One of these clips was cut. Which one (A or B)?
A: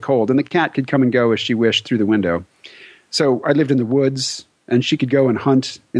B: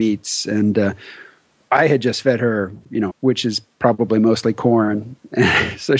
B